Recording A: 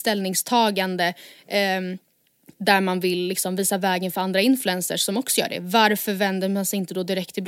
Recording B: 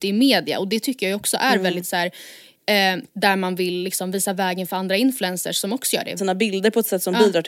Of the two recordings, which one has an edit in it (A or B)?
B